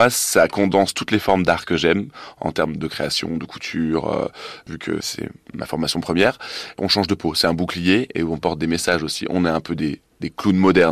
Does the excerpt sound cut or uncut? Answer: cut